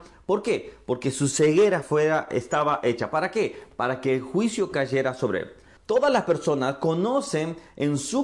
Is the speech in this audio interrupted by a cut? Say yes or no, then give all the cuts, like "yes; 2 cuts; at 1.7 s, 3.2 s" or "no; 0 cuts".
yes; 2 cuts; at 1.8 s, 5.8 s